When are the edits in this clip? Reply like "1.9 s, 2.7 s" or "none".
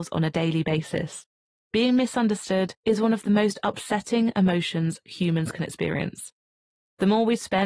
1.5 s, 2.8 s